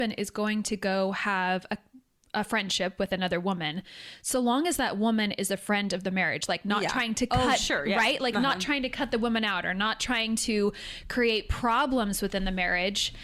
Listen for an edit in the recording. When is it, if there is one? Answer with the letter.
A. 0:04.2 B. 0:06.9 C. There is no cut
C